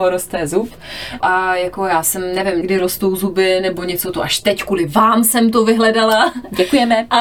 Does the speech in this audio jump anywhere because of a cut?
yes; 2 cuts; at 1.2 s, 2.6 s

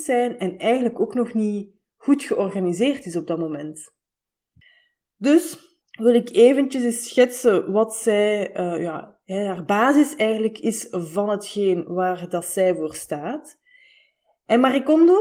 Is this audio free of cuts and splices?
no; 1 cut; at 5.8 s

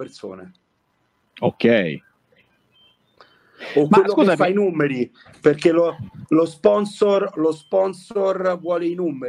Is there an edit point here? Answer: no; 0 cuts

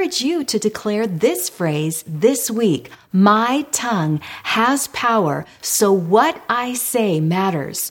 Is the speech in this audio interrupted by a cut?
no; 0 cuts

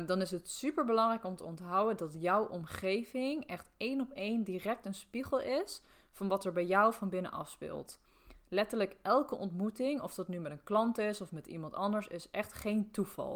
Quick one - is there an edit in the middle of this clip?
no; 0 cuts

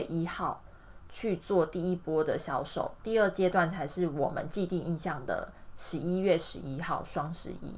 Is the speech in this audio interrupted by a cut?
no; 0 cuts

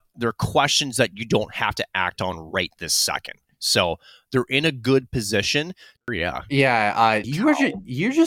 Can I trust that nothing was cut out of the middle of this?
no; 2 cuts; at 6.0 s, 7.2 s

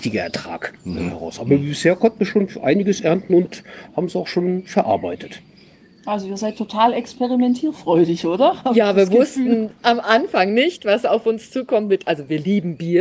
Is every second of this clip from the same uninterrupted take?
yes; 0 cuts

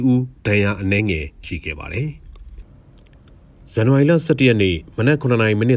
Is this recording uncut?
no; 1 cut; at 1.4 s

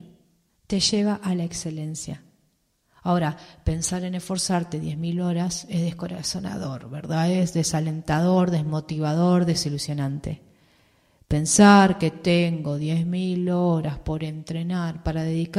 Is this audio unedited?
yes; 0 cuts

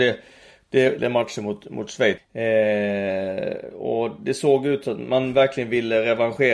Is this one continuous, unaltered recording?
no; 2 cuts; at 1.0 s, 2.2 s

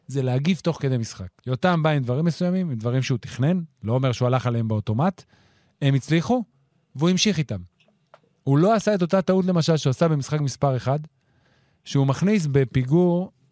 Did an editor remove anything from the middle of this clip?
yes; 1 cut; at 1.4 s

